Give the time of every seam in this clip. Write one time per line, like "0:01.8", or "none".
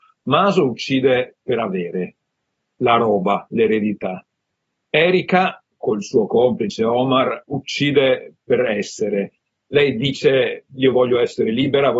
none

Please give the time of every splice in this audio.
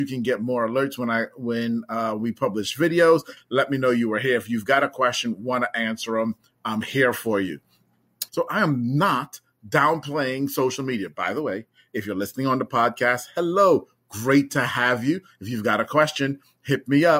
0:03.4
0:08.3

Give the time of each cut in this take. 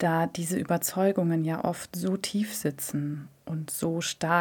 none

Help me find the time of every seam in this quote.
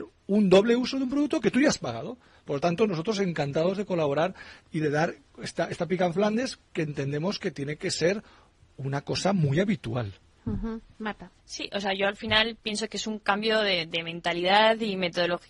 0:11.4

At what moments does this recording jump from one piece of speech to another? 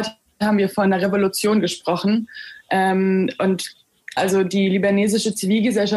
0:04.2

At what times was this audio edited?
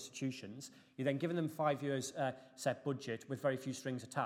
none

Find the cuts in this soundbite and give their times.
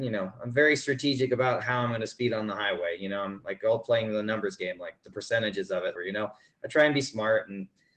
0:06.0

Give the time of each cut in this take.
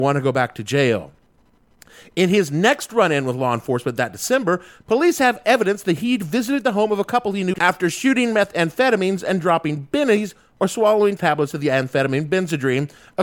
0:07.5
0:11.2

